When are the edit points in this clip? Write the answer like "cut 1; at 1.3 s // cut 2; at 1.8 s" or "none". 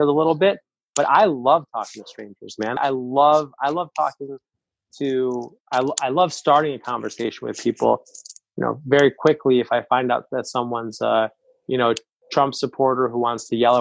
cut 1; at 2.8 s